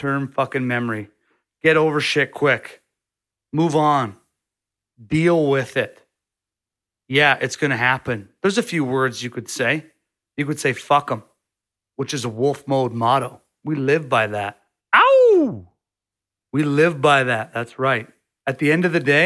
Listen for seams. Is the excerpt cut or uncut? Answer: uncut